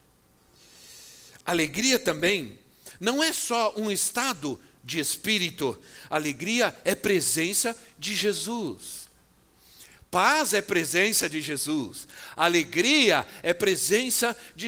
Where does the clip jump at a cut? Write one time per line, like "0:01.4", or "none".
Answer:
none